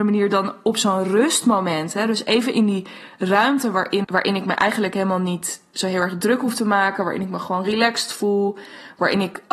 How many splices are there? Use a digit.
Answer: 1